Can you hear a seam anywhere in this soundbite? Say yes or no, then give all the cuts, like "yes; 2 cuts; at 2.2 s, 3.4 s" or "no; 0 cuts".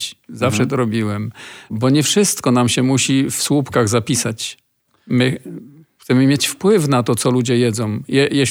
yes; 1 cut; at 1.7 s